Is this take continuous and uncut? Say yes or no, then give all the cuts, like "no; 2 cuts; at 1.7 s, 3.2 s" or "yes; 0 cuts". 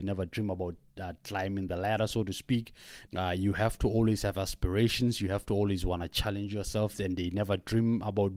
no; 2 cuts; at 3.1 s, 6.9 s